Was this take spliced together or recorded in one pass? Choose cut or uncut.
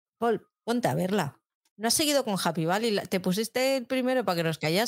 uncut